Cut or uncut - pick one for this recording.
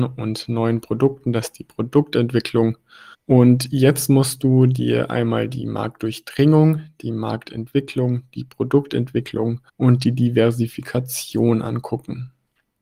cut